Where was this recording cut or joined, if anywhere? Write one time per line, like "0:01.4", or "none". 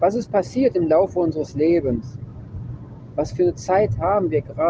none